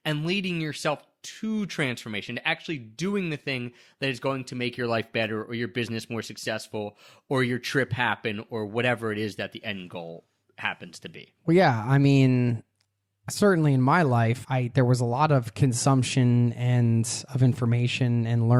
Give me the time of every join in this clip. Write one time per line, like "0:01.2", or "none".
0:11.4
0:14.4